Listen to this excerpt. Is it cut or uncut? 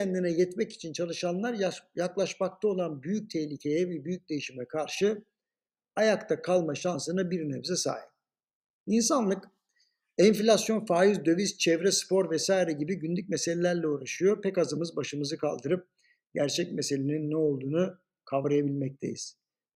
uncut